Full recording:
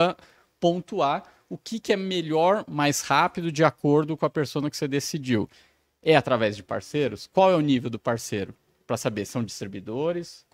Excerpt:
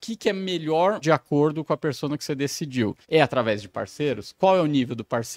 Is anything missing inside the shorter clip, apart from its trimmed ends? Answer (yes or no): yes